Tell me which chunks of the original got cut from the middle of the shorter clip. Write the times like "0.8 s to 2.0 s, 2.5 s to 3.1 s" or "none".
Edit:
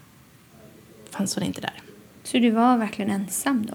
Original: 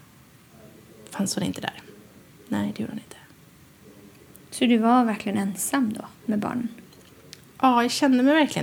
2.2 s to 4.5 s